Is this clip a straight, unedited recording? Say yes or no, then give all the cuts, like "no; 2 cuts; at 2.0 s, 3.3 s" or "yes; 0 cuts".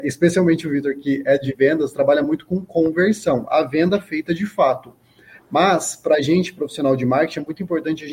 yes; 0 cuts